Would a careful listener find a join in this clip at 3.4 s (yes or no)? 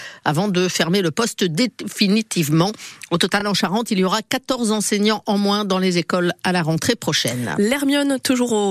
no